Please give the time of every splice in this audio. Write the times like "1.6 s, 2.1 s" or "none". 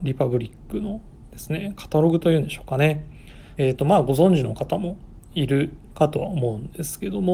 3.6 s